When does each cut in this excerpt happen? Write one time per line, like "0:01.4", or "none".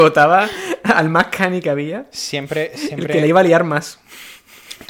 none